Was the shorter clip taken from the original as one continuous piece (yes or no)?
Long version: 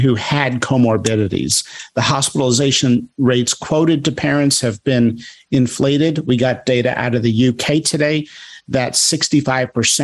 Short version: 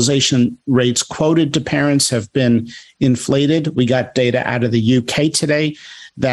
yes